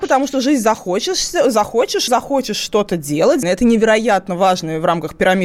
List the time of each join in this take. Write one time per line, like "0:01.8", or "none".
0:02.1
0:03.4